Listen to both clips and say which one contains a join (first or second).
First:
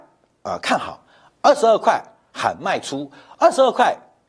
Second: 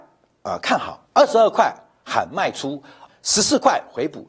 second